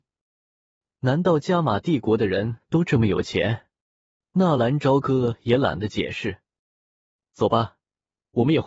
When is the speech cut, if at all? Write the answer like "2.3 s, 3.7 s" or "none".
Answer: 4.2 s